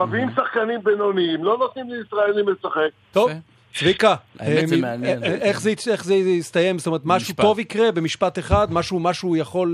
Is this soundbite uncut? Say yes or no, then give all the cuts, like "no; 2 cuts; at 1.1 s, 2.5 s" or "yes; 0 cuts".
no; 1 cut; at 3.1 s